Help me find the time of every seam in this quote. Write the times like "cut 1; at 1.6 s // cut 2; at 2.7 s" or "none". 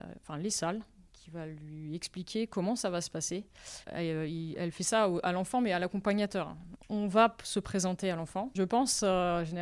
cut 1; at 3.8 s // cut 2; at 6.8 s // cut 3; at 8.6 s